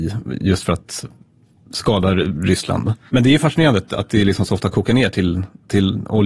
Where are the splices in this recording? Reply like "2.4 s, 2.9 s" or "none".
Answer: 3.1 s